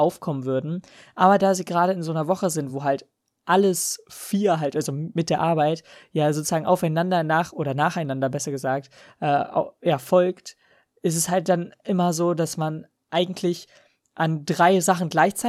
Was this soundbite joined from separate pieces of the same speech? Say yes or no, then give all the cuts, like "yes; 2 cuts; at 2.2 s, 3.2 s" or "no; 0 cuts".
no; 0 cuts